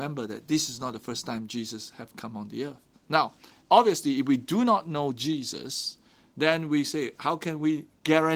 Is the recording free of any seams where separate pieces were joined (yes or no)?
no